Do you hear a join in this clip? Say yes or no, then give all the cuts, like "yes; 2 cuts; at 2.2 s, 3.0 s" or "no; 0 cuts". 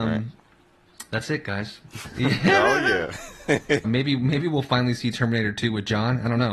yes; 2 cuts; at 2.1 s, 3.8 s